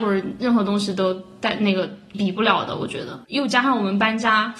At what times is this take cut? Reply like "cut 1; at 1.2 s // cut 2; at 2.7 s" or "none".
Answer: cut 1; at 2.1 s // cut 2; at 3.2 s